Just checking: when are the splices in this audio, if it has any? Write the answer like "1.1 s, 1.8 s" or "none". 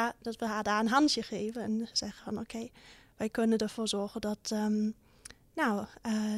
none